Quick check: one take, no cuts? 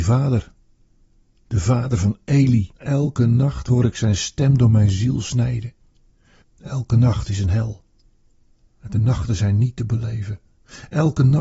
no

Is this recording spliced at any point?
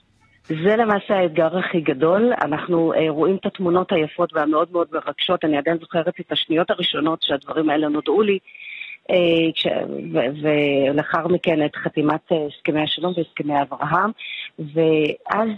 no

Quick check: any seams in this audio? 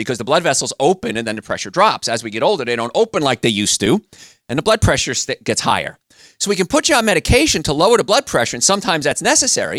no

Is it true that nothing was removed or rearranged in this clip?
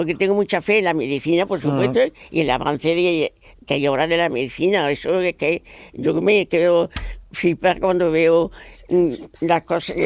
yes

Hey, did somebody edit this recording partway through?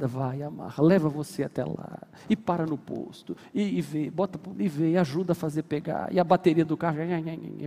yes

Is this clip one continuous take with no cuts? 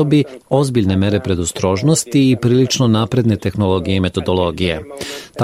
yes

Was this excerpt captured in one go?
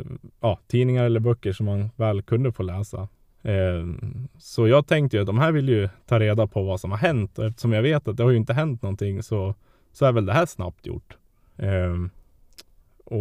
no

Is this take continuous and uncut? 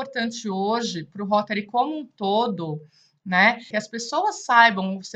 no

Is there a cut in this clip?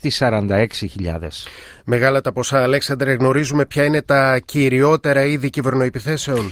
no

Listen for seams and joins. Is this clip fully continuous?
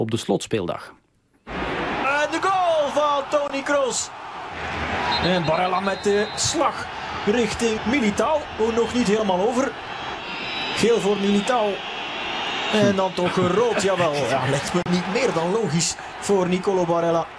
no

